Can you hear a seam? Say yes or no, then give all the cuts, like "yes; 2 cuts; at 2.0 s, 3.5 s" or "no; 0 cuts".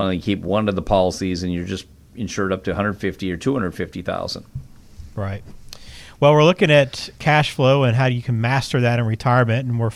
no; 0 cuts